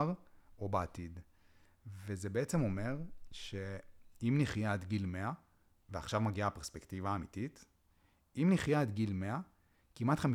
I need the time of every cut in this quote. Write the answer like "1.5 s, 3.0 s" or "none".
none

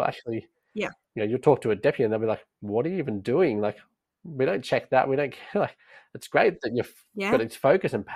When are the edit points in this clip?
none

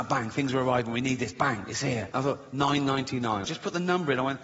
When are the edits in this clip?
2.1 s, 3.4 s

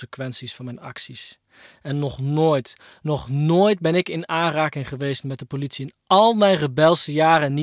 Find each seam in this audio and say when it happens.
none

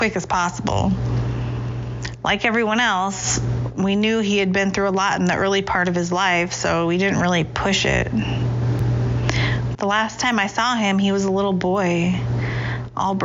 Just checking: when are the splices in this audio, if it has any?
9.7 s

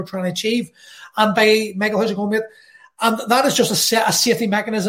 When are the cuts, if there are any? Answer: none

